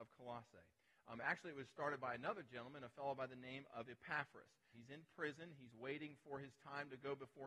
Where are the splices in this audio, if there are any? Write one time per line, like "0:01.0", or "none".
0:04.7

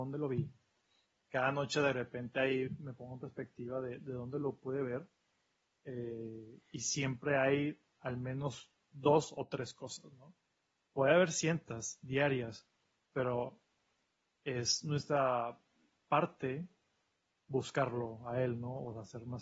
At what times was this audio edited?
none

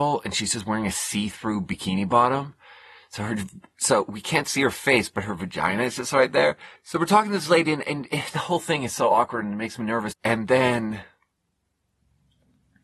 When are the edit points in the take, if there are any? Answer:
0:06.7
0:10.1

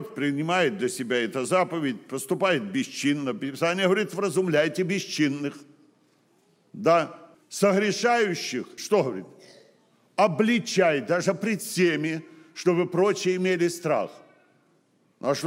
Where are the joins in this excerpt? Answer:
0:07.3
0:08.8

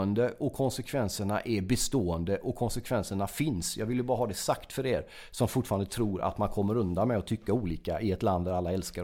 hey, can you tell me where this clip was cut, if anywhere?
none

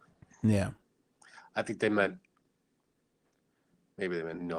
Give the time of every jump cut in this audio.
none

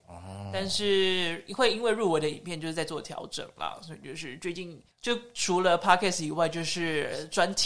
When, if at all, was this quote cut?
0:04.9

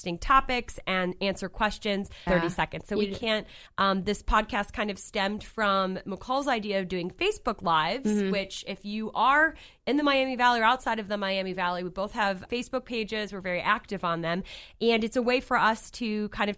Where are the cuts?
0:02.3
0:03.7
0:12.5

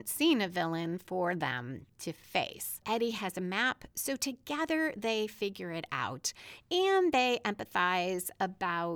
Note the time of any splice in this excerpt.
0:02.8

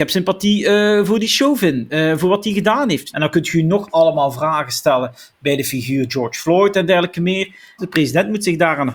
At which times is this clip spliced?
0:03.1
0:07.8

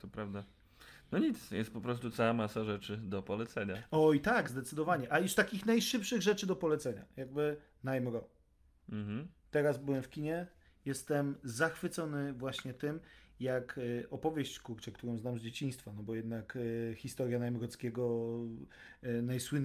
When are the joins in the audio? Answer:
none

